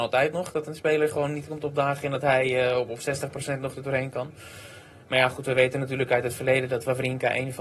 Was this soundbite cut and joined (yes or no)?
no